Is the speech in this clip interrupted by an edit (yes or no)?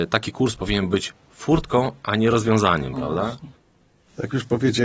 no